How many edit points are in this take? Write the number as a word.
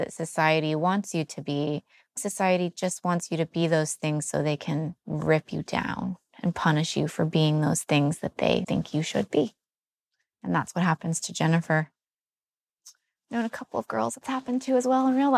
one